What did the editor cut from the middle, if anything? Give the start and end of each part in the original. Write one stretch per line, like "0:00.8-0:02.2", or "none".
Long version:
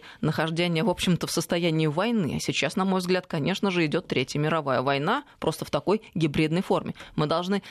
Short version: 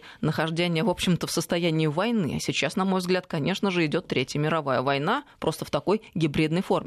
none